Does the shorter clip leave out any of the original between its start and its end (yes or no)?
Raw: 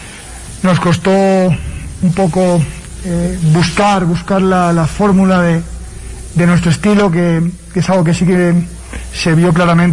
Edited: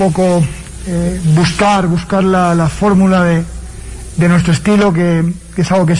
no